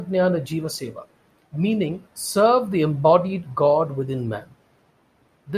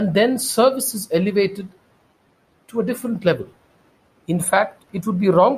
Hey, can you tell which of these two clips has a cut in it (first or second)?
second